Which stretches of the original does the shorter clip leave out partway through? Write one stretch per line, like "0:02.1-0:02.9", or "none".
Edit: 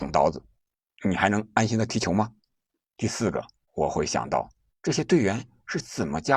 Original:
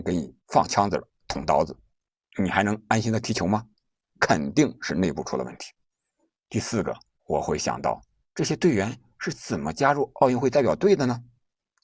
0:04.1-0:06.3

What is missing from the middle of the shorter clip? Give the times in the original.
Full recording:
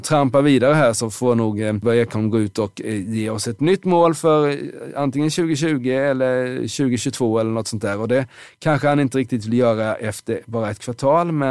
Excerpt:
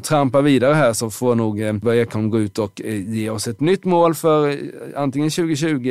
none

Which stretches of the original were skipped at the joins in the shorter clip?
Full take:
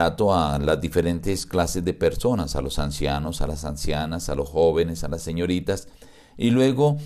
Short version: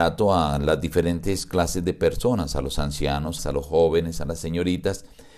0:03.4-0:04.2

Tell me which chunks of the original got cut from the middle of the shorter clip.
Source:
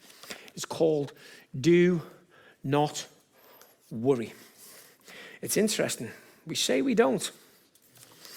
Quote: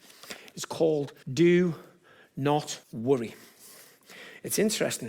0:01.2-0:01.5
0:03.1-0:03.8

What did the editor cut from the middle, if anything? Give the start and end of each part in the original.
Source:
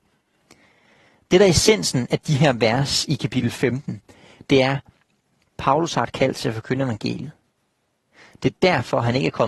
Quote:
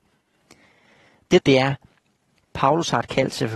0:01.4-0:04.4

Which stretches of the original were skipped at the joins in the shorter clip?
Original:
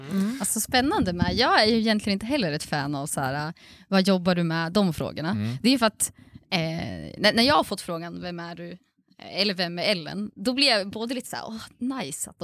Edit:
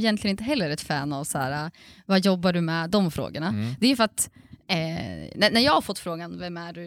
none

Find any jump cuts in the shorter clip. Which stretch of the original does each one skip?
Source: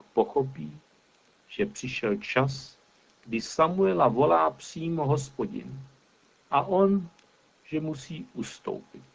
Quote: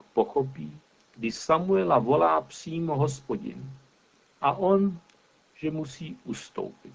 0:01.0-0:03.1

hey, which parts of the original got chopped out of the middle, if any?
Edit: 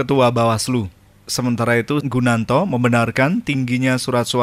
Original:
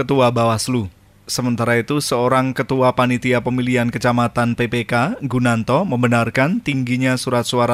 0:02.0-0:05.2

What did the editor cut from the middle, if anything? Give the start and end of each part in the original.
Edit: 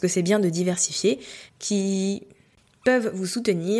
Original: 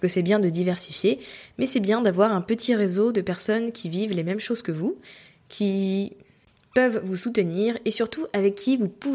0:01.5-0:05.4

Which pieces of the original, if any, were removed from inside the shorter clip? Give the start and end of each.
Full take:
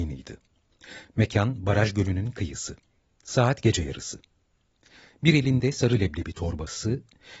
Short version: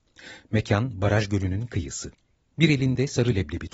0:03.2-0:05.2

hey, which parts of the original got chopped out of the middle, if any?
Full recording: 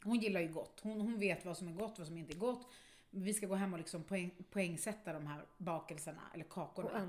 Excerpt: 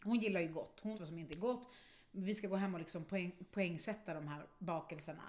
0:00.9-0:01.9

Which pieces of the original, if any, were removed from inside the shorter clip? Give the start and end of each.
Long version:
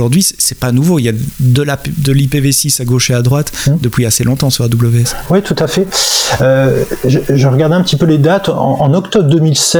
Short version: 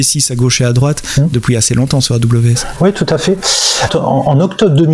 0:06.4-0:08.4

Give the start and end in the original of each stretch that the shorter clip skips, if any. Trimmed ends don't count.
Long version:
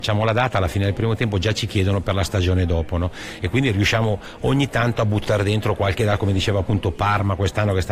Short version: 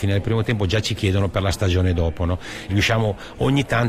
0:03.4-0:03.7

